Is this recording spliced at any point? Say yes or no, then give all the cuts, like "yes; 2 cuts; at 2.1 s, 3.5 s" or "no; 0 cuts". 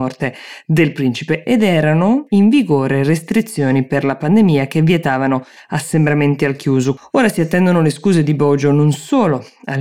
yes; 1 cut; at 7.0 s